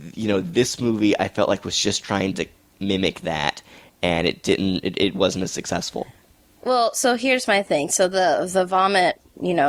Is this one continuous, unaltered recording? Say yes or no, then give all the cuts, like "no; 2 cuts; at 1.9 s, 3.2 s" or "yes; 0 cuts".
yes; 0 cuts